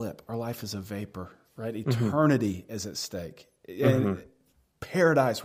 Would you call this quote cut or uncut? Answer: uncut